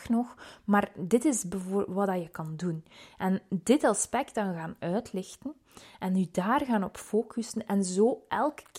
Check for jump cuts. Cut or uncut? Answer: uncut